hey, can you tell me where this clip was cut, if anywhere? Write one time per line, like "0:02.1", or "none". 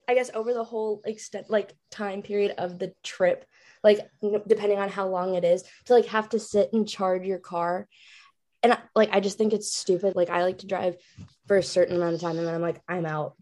0:10.1